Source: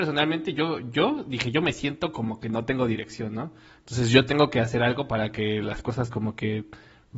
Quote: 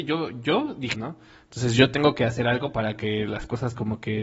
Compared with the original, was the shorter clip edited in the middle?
yes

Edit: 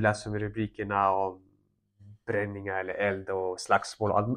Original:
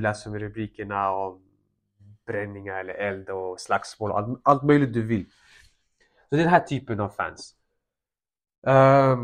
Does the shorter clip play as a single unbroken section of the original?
yes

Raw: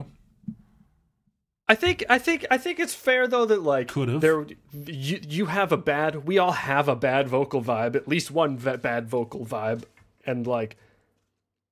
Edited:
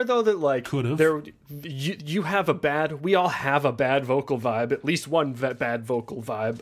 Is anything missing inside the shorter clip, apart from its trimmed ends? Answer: no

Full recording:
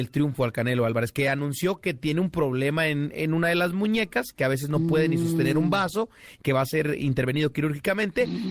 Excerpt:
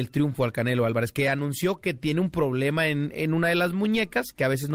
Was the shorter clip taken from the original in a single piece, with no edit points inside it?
yes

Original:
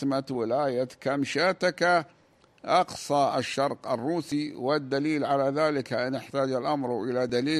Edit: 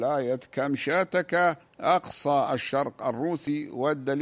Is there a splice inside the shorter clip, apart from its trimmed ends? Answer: yes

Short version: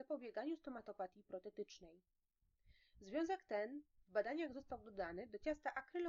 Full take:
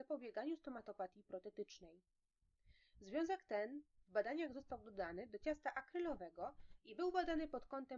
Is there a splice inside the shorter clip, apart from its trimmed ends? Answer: no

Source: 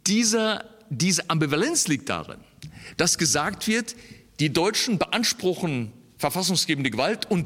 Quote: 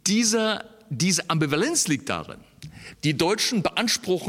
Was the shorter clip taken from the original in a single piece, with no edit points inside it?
no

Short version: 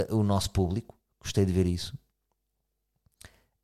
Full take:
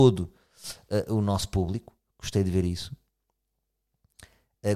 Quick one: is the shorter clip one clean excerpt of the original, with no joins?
yes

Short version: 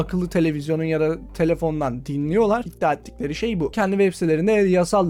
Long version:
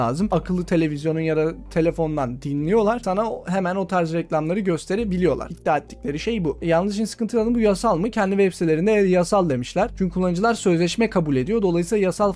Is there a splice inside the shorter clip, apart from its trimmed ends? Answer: yes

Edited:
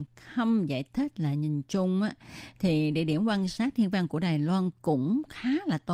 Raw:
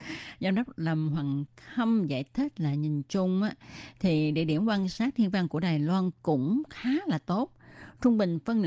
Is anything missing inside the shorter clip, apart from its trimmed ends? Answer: no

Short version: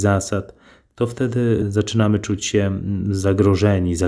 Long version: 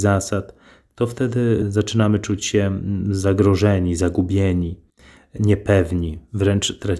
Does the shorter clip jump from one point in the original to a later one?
no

